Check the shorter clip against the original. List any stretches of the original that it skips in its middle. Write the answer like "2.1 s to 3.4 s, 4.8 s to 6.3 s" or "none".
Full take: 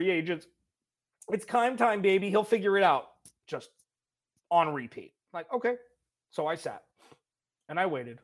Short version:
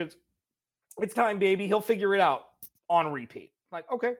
1.5 s to 1.8 s, 3.3 s to 4.3 s

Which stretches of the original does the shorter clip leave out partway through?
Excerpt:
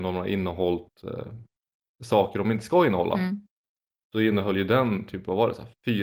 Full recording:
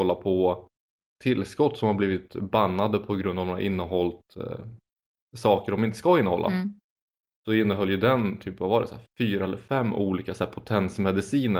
none

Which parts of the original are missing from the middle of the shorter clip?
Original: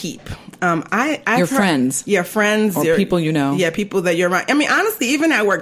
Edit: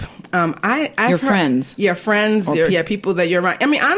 3.0 s to 3.6 s

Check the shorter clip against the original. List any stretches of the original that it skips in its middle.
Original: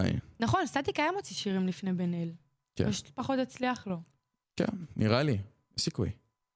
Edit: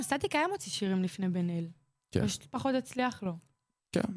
none

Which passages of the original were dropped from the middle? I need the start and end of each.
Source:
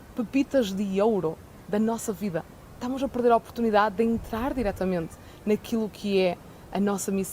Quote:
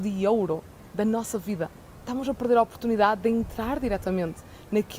none

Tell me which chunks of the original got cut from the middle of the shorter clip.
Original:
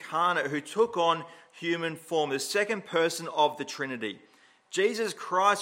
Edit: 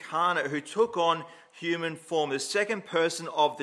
none

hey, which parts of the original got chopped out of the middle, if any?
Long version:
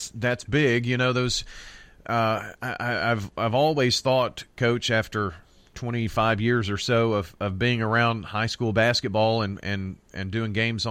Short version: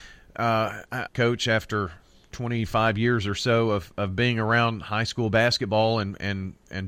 2.8 s to 4.5 s

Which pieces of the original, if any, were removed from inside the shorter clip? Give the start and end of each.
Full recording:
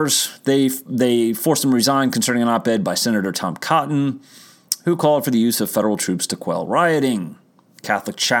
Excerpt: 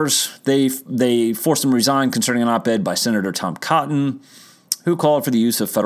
none

